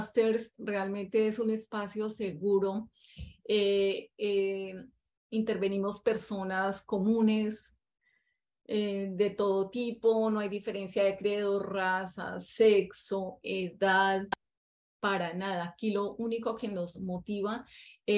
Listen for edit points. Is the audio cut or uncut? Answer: uncut